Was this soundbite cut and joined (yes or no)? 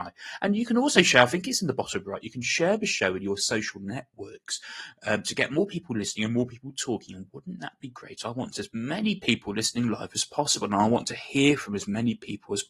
no